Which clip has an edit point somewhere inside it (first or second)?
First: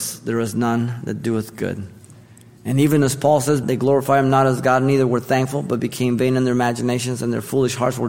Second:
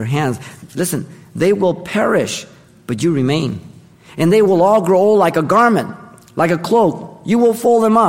first